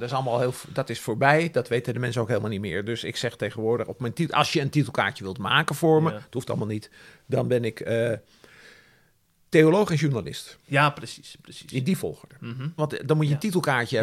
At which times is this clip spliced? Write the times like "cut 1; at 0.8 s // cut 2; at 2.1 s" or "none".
cut 1; at 12.8 s